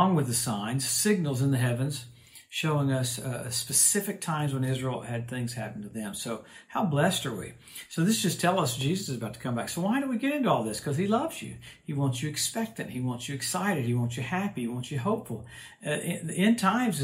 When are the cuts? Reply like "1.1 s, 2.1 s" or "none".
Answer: none